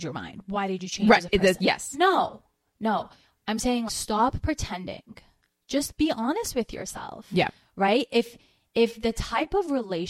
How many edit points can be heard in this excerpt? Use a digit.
1